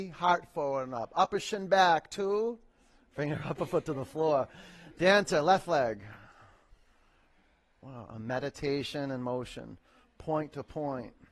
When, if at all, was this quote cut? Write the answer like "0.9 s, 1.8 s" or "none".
none